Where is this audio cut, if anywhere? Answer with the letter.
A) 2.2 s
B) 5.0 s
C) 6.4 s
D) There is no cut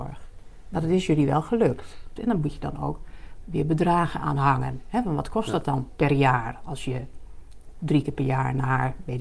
A